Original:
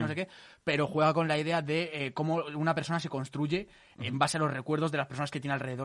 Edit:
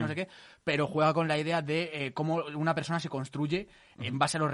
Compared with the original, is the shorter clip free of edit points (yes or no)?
yes